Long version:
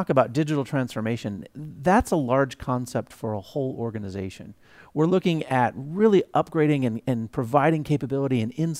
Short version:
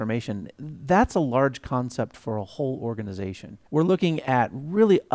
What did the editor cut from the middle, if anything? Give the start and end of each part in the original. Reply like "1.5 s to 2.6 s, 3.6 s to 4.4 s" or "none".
4.6 s to 4.9 s